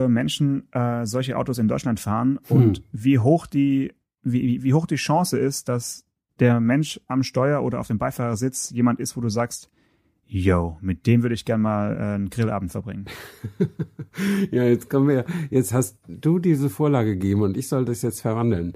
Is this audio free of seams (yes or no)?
yes